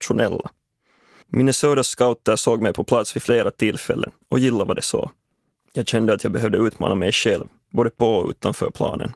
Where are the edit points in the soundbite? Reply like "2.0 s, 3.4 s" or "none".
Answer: 1.2 s, 5.7 s